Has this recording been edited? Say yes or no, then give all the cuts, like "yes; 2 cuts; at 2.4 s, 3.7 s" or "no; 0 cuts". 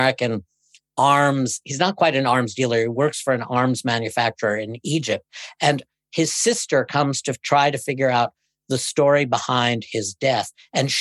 no; 0 cuts